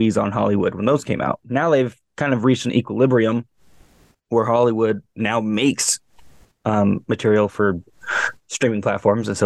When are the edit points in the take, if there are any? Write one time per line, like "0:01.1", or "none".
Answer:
none